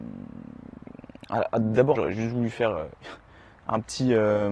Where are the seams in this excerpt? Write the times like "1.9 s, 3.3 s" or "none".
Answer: 1.9 s